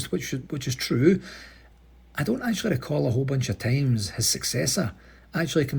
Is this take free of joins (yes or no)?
yes